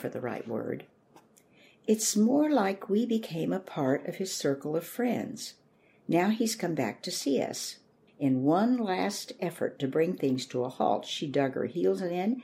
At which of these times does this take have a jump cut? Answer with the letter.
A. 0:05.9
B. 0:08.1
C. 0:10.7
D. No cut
B